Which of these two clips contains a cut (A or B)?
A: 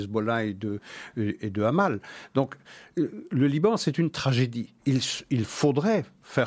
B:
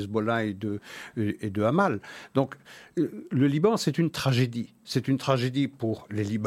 A